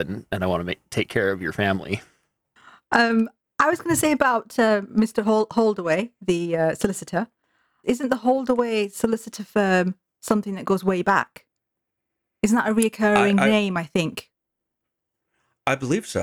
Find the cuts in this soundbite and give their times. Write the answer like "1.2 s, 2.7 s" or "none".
7.8 s